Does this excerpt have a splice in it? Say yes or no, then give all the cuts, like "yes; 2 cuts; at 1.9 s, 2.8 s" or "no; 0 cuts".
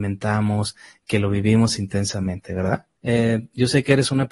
yes; 1 cut; at 3.0 s